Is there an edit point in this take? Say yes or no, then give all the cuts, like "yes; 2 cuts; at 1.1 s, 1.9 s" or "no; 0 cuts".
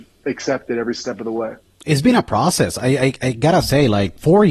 no; 0 cuts